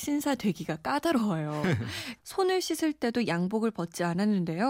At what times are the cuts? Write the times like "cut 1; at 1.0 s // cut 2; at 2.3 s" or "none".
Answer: cut 1; at 2.2 s